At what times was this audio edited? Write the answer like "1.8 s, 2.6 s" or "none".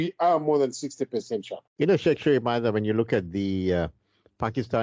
1.7 s